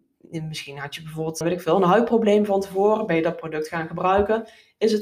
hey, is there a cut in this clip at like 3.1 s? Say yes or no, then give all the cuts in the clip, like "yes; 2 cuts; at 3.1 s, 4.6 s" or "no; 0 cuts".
no; 1 cut; at 1.4 s